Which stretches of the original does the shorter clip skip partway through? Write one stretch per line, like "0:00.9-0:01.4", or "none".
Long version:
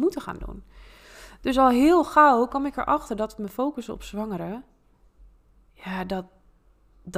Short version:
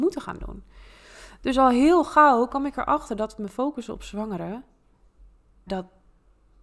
0:05.7-0:06.1